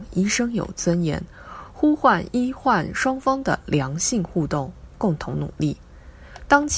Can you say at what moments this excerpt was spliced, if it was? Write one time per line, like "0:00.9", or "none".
none